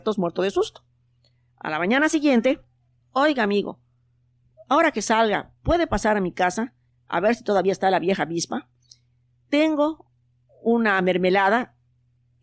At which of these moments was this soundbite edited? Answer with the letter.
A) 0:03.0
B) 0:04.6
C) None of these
A